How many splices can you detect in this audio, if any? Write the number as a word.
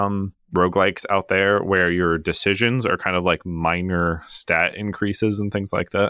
zero